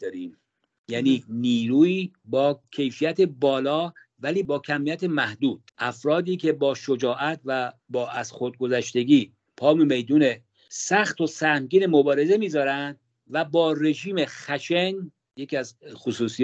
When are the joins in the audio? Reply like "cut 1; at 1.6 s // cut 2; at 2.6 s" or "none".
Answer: cut 1; at 5.7 s // cut 2; at 7.8 s